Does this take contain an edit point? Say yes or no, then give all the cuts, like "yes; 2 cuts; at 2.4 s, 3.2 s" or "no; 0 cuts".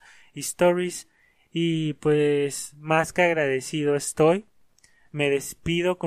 no; 0 cuts